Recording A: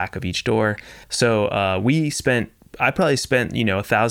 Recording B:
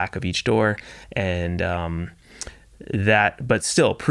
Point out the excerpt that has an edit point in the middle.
A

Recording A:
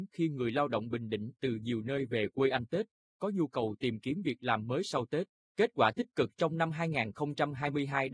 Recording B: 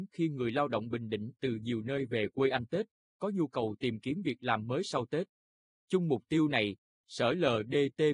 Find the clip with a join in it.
A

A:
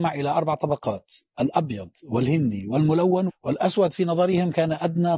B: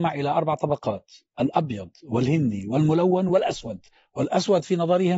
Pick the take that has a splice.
A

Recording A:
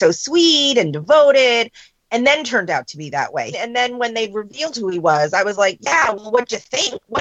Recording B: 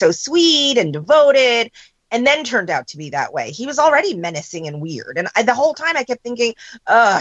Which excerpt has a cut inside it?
A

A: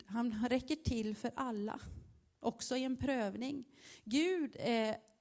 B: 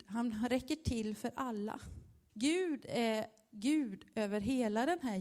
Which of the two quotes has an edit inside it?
B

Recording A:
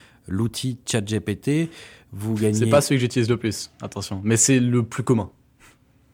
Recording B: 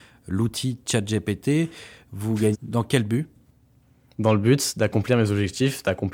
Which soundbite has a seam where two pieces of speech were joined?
B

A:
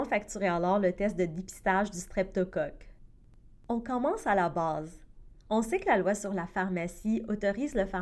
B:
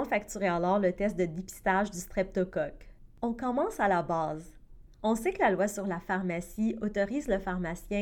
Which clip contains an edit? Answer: B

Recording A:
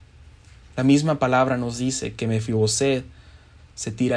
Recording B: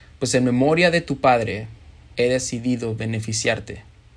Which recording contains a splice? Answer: B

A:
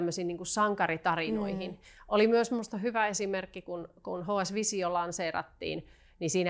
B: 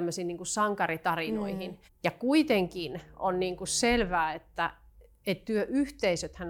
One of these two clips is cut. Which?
B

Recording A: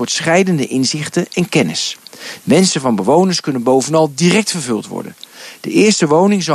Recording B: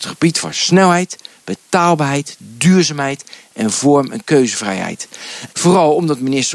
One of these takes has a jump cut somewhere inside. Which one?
B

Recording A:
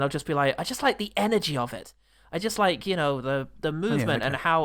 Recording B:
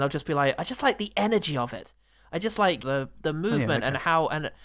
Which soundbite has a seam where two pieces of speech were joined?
B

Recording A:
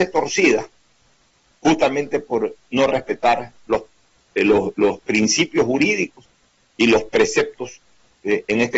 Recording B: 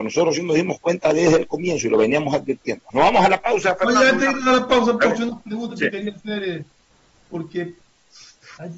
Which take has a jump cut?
B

